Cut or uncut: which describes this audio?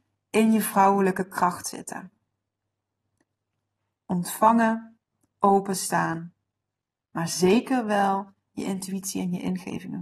uncut